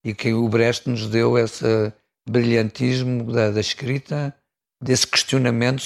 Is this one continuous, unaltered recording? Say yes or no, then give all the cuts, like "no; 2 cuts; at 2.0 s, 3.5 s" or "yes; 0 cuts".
yes; 0 cuts